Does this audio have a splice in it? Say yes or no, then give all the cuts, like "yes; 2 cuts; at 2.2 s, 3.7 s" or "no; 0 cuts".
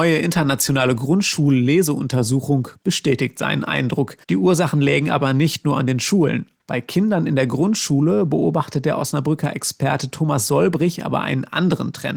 yes; 3 cuts; at 2.7 s, 4.2 s, 6.6 s